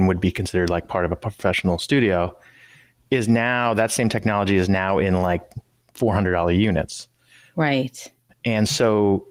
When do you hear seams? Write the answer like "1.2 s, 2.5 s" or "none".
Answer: none